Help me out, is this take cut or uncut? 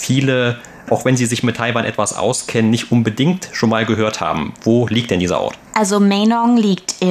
cut